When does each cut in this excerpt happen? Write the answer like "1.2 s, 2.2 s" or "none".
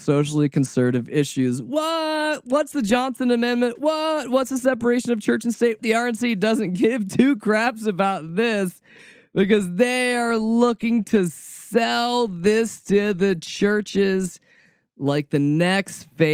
5.8 s